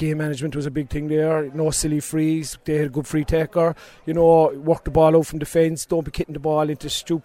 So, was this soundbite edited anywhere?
no; 0 cuts

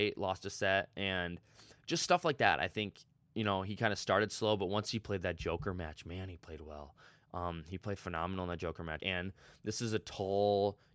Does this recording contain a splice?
yes; 1 cut; at 9.0 s

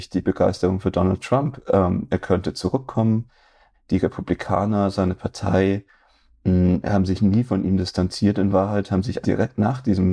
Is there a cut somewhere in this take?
yes; 2 cuts; at 3.7 s, 9.2 s

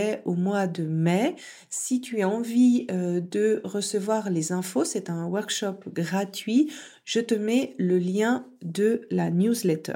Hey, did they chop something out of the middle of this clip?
no; 0 cuts

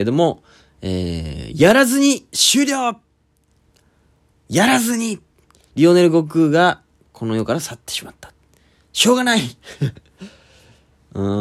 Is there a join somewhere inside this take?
no; 0 cuts

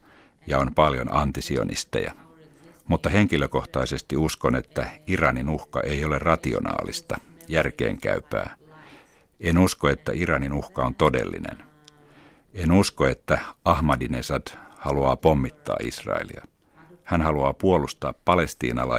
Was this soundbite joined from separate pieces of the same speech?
no; 0 cuts

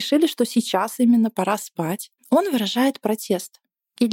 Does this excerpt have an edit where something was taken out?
yes; 1 cut; at 2.2 s

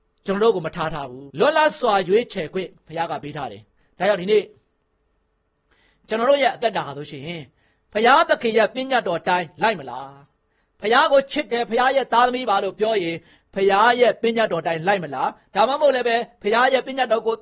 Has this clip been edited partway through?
yes; 1 cut; at 1.3 s

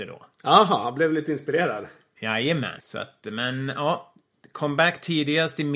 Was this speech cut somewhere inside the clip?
yes; 1 cut; at 2.8 s

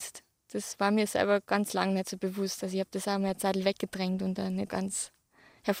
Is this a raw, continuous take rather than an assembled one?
no; 1 cut; at 4.7 s

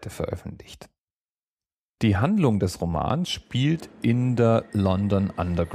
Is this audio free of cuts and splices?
yes; 0 cuts

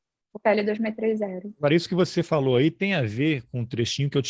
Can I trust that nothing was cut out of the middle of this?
yes; 0 cuts

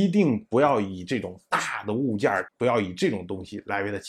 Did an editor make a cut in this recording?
yes; 1 cut; at 2.5 s

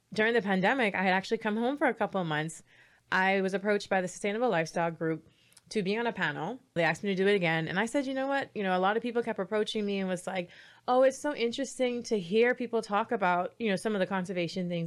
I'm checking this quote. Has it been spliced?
yes; 1 cut; at 6.8 s

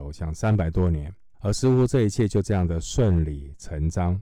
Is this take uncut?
no; 1 cut; at 1.3 s

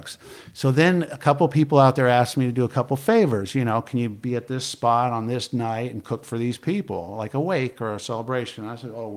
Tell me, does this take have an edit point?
no; 0 cuts

